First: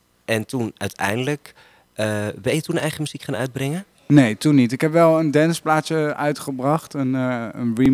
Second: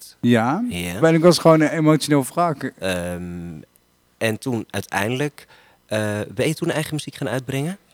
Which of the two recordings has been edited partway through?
second; 2 cuts; at 1.0 s, 2.8 s

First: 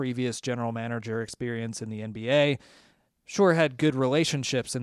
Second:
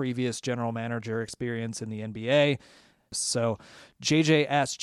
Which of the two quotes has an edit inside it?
second; 1 cut; at 3.1 s

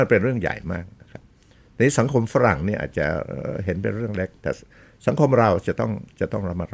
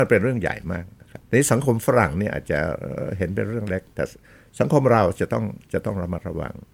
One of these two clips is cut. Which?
second; 1 cut; at 1.3 s

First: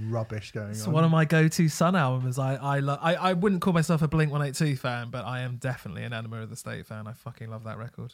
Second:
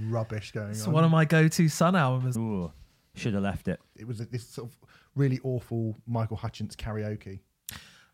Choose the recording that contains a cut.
second; 2 cuts; at 2.3 s, 3.9 s

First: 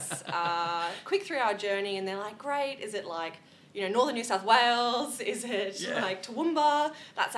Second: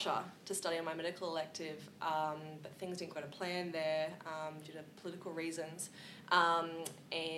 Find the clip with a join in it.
second; 1 cut; at 3.1 s

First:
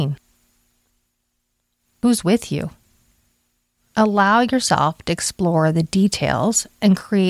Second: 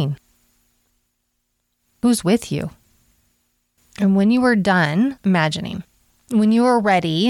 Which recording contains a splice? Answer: second; 1 cut; at 3.8 s

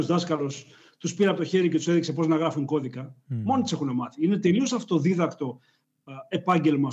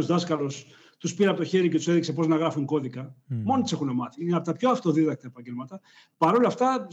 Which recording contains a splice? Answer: second; 1 cut; at 4.2 s

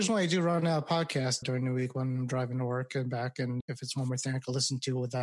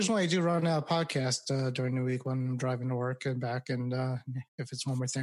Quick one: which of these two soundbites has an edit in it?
first; 2 cuts; at 1.4 s, 3.6 s

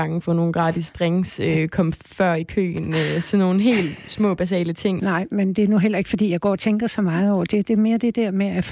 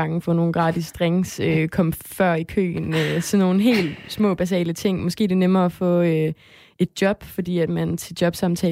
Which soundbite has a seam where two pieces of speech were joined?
first; 1 cut; at 5.0 s

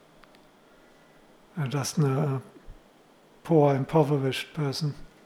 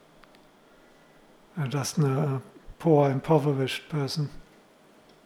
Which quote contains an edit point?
second; 1 cut; at 2.7 s

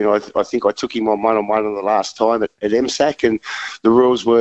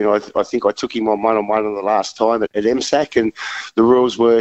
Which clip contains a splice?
second; 1 cut; at 2.5 s

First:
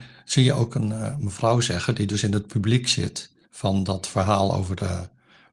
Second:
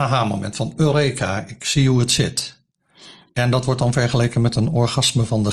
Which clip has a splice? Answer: first; 1 cut; at 3.4 s

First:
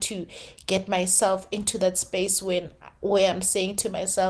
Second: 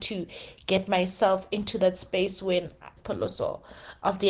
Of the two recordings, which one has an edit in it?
second; 1 cut; at 3.0 s

